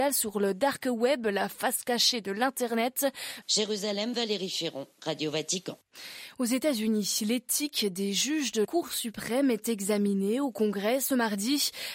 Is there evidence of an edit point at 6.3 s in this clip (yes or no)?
no